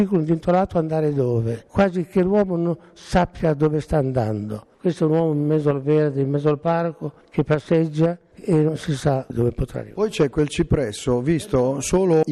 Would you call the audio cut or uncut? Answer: uncut